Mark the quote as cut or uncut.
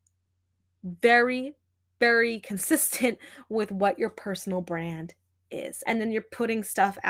cut